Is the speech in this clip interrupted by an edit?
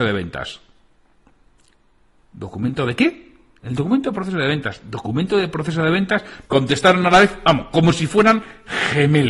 yes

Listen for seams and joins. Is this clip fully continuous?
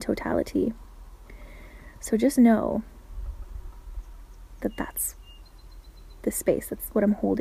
yes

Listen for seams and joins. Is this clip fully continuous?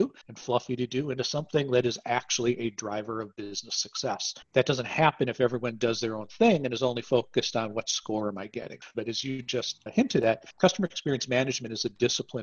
no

